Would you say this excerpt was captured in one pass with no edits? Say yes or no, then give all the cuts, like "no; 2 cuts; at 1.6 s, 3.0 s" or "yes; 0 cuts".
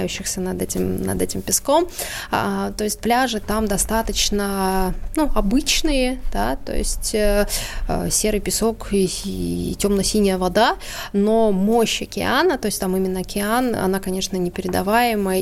yes; 0 cuts